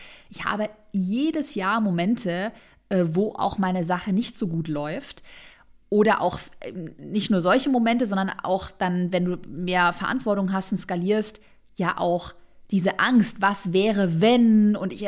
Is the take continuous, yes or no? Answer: yes